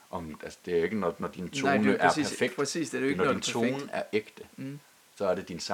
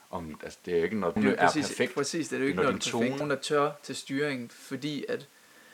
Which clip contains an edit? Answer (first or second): second